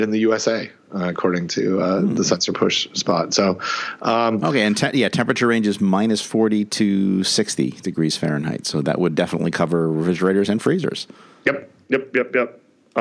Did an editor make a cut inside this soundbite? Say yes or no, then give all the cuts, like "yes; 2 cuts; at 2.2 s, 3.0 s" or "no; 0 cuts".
no; 0 cuts